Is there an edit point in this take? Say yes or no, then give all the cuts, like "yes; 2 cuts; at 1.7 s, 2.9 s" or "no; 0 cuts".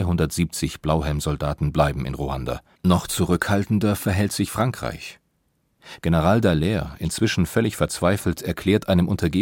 yes; 2 cuts; at 2.8 s, 6.0 s